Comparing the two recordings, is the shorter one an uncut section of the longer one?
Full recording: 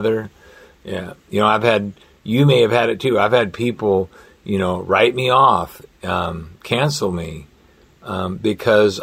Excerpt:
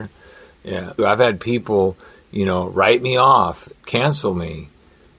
no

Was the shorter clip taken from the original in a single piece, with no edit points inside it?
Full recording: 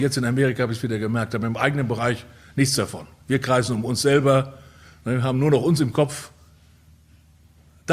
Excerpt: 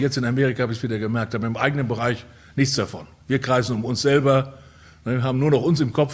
yes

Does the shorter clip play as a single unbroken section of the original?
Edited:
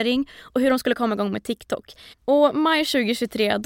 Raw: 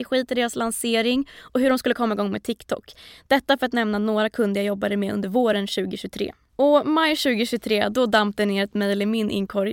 no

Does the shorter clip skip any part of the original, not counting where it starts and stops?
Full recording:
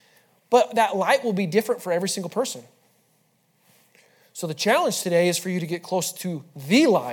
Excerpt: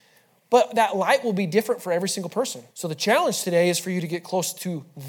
yes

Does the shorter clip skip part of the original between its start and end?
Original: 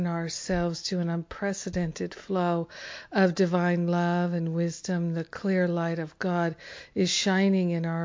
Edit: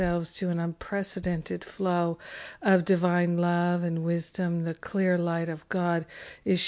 no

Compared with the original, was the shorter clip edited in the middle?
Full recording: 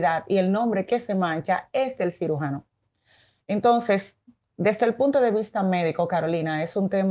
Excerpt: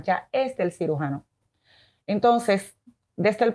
no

